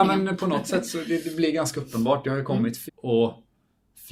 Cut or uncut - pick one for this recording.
cut